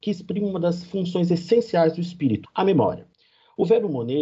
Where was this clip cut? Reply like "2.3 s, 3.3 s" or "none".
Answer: 2.4 s